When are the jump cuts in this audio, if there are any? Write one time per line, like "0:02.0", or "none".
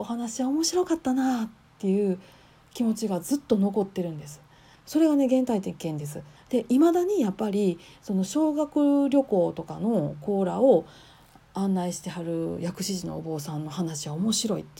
0:04.8
0:06.4